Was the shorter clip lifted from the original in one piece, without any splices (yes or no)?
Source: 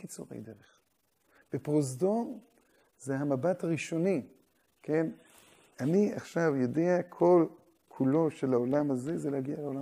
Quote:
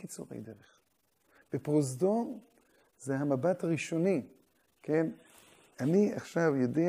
yes